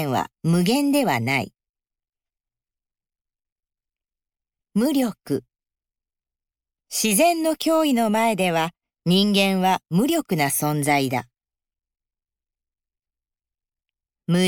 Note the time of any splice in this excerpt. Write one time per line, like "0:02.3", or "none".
none